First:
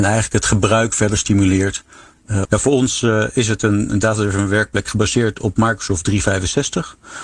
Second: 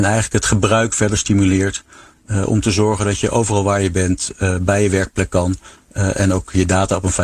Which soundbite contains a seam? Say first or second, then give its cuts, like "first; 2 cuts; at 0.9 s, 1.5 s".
first; 1 cut; at 2.4 s